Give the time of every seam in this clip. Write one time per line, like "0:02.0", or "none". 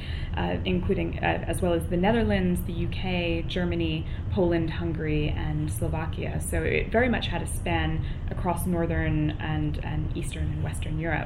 none